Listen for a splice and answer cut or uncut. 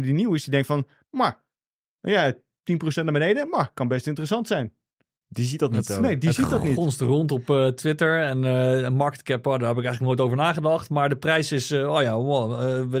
uncut